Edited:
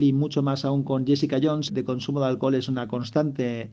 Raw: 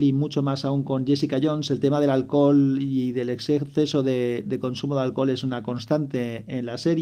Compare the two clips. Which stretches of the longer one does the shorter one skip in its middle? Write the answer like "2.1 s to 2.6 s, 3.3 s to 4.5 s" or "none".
1.7 s to 4.4 s